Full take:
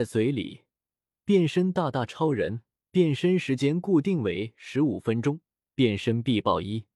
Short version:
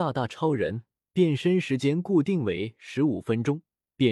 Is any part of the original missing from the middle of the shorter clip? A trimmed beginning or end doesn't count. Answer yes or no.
no